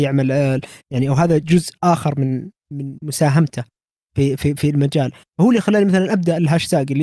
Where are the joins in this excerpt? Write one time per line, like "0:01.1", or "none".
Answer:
none